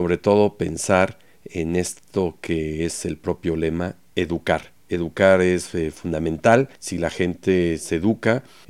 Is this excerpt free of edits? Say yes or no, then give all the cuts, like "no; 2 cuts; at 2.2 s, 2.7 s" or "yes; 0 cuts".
no; 1 cut; at 6.8 s